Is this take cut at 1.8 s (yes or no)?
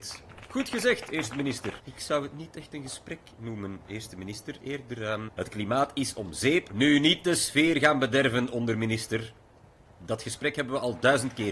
yes